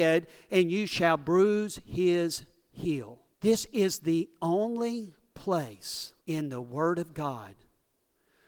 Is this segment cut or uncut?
cut